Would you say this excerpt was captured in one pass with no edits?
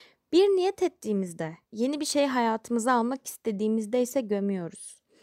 no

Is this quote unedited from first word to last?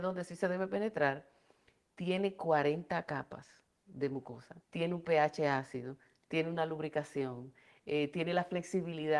no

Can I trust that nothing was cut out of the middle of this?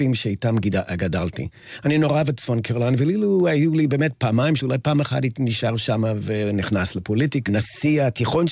no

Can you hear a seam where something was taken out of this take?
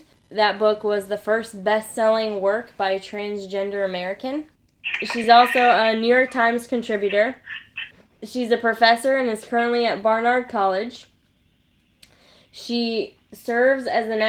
no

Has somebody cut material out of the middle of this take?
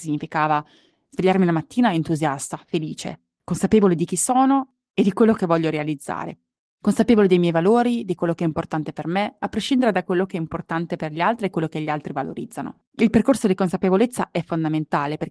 yes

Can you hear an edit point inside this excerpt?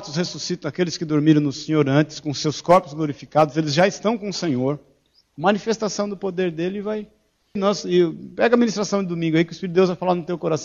yes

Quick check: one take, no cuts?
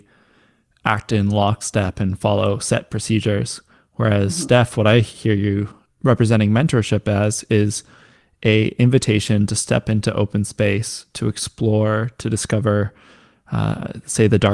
yes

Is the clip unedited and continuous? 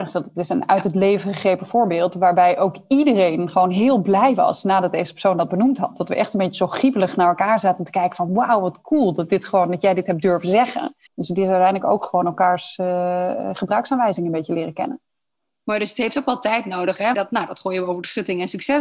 no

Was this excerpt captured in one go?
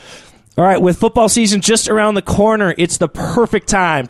yes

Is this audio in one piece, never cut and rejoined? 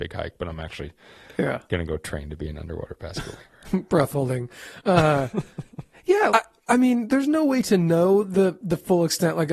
no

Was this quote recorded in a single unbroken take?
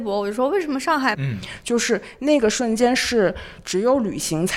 no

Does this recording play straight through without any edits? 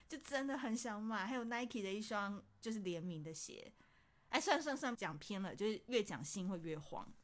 no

